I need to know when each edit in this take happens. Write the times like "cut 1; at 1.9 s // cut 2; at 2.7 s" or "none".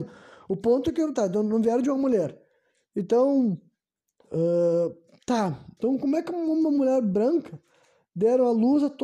cut 1; at 5.8 s